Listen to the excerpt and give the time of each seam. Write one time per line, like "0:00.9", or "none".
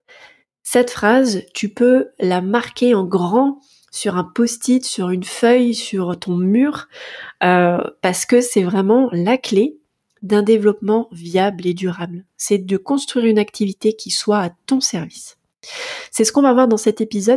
none